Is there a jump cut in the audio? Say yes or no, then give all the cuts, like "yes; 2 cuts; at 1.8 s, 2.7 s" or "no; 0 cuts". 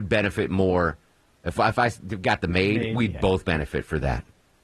no; 0 cuts